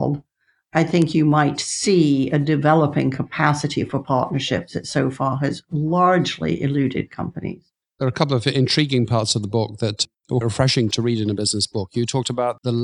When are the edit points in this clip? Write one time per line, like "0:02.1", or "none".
0:07.8
0:10.4